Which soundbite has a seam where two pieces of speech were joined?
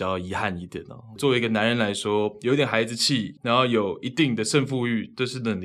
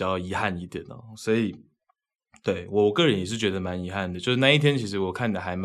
first; 2 cuts; at 1.2 s, 3.4 s

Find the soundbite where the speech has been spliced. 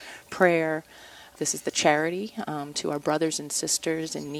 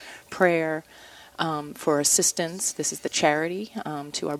first; 1 cut; at 1.4 s

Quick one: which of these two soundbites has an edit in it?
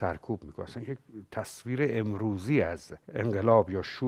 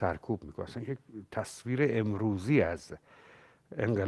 first; 1 cut; at 3.0 s

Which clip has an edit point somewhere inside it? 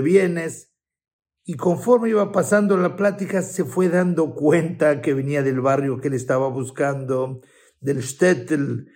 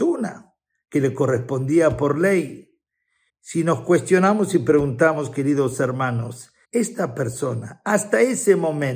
second; 2 cuts; at 3.3 s, 6.6 s

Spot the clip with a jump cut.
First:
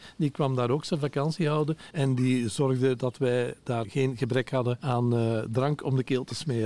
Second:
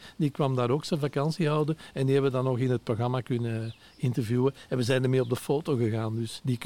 first; 2 cuts; at 1.9 s, 3.8 s

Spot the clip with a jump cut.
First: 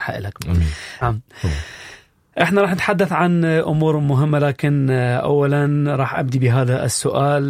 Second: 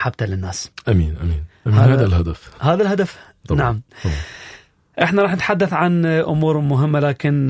first; 1 cut; at 1.0 s

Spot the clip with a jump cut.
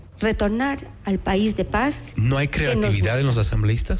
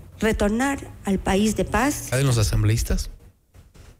second; 1 cut; at 2.1 s

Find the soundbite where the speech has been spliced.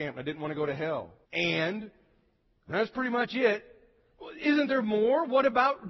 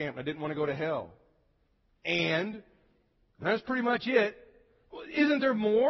first; 1 cut; at 1.2 s

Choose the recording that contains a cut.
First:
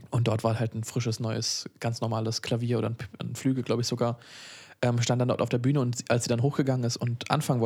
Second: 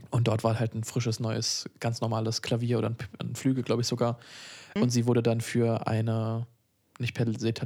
second; 1 cut; at 4.8 s

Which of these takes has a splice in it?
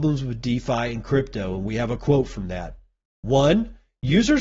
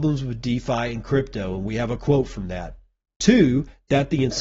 second; 1 cut; at 3.1 s

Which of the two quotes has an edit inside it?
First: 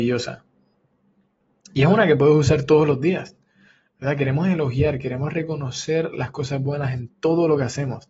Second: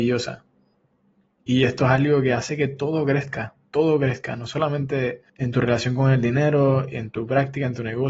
second; 2 cuts; at 1.4 s, 5.3 s

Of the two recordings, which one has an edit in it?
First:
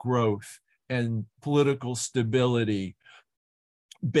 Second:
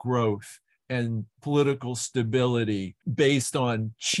second; 1 cut; at 3.0 s

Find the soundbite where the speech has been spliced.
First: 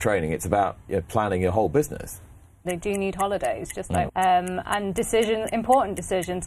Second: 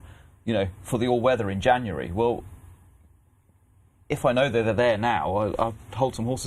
first; 2 cuts; at 2.6 s, 4.1 s

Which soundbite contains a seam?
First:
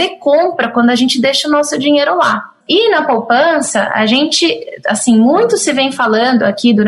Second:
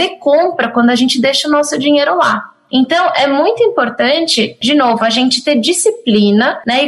first; 1 cut; at 2.6 s

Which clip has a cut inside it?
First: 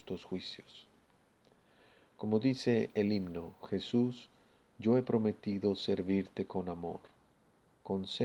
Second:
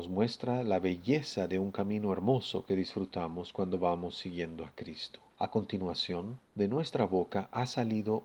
second; 2 cuts; at 5.3 s, 6.4 s

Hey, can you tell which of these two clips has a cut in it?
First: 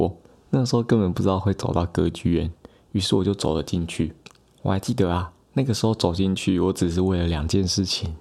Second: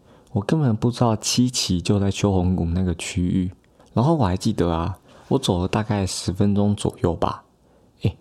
second; 1 cut; at 3.8 s

